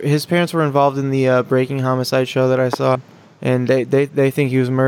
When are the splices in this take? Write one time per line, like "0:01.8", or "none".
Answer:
none